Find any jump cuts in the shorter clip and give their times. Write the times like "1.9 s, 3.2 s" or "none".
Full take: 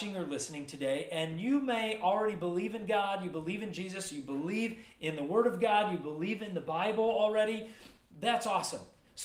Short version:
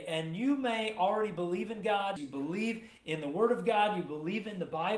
2.2 s